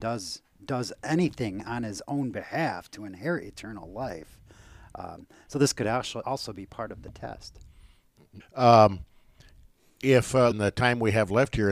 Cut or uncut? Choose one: cut